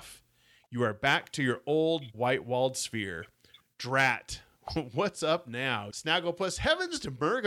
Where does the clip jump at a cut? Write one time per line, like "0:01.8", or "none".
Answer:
0:02.1
0:05.9